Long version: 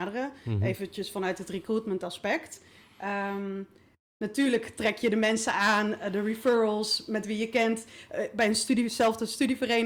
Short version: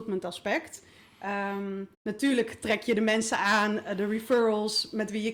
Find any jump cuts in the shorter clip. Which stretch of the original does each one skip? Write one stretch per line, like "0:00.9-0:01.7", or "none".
0:03.7-0:04.1